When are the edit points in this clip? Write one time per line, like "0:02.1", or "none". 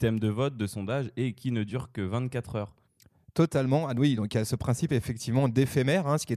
none